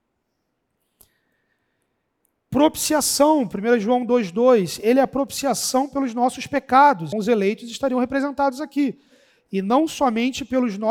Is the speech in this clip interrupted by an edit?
yes; 1 cut; at 7.1 s

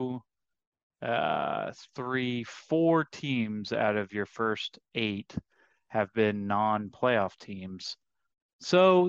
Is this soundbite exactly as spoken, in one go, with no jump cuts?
yes; 0 cuts

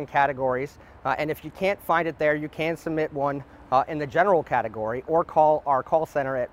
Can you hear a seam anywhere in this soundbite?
no; 0 cuts

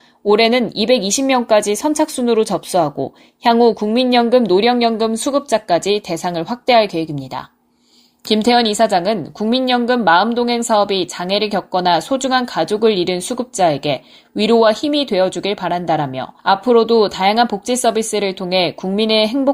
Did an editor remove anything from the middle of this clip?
yes; 1 cut; at 16.4 s

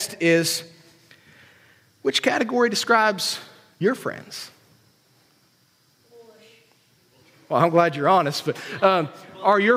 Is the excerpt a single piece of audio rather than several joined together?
yes; 0 cuts

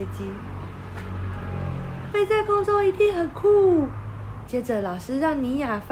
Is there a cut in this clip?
yes; 2 cuts; at 2.1 s, 4.5 s

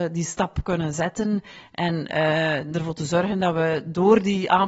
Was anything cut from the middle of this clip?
no; 0 cuts

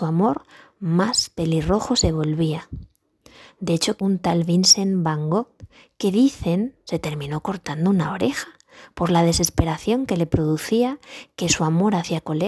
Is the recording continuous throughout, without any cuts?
no; 1 cut; at 4.0 s

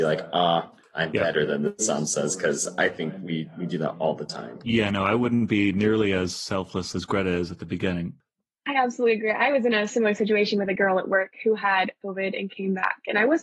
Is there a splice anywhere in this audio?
no; 0 cuts

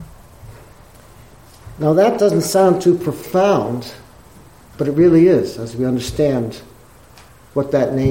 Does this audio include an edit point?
no; 0 cuts

